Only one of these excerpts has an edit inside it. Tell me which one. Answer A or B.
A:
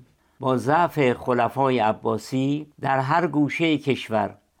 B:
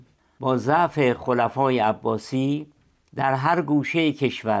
A